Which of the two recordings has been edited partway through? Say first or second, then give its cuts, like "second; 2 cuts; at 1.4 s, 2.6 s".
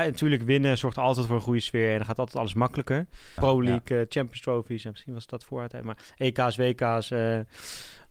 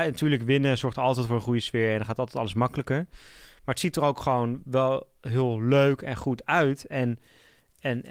first; 1 cut; at 3.4 s